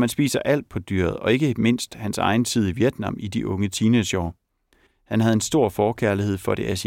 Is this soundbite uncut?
no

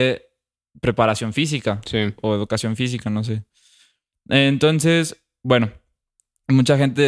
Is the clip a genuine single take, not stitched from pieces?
yes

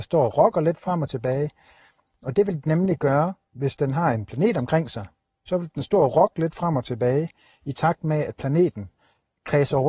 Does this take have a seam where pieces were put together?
no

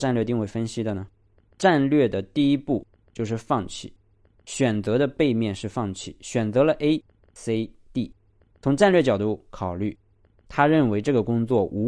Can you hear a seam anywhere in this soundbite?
yes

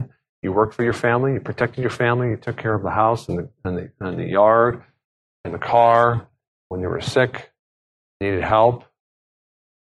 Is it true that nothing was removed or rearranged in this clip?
yes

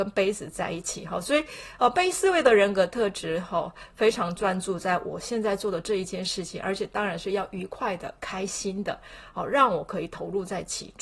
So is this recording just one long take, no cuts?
yes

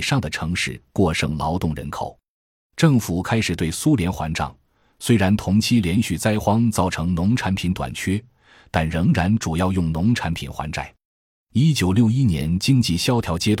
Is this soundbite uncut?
yes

